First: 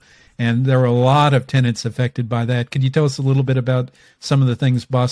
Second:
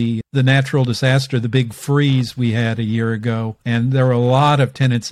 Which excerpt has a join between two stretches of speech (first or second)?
second